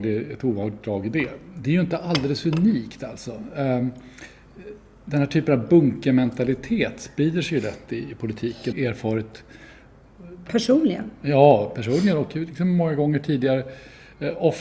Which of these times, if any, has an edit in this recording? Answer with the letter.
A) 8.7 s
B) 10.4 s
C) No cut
A